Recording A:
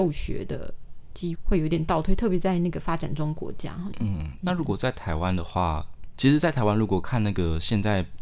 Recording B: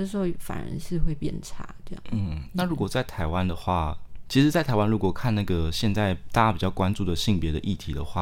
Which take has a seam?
A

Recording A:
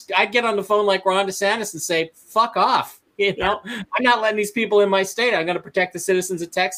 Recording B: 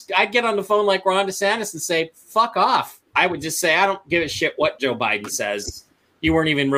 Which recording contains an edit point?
B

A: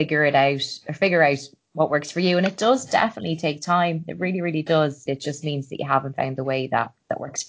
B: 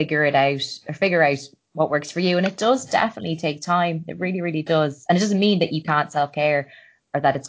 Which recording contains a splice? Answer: A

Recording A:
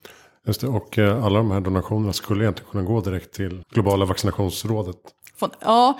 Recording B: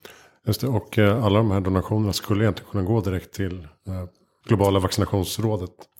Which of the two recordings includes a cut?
A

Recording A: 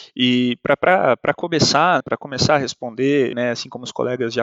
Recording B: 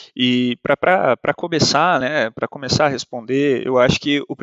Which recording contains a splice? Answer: A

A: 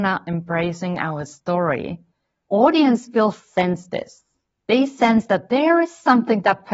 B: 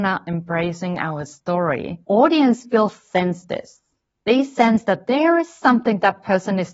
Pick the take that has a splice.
B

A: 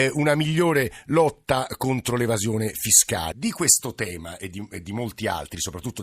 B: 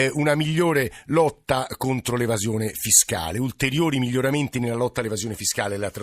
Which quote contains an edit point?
A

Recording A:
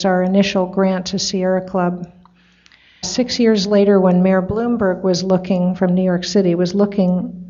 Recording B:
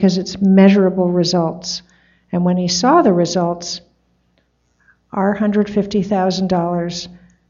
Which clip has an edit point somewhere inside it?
A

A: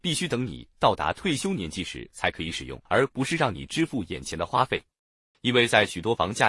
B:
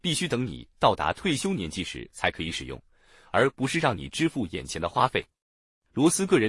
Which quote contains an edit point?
A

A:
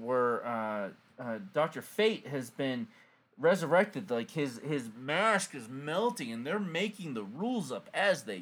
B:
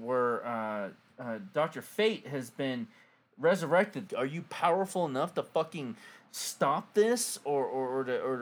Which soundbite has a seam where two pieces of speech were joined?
B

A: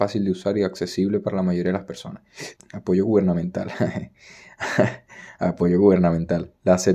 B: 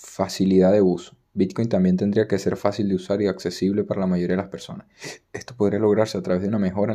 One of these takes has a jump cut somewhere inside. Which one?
A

